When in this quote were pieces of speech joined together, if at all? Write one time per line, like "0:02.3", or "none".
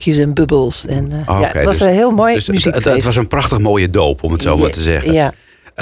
none